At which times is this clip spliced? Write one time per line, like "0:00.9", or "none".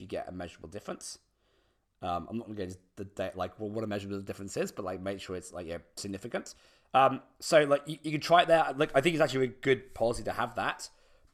none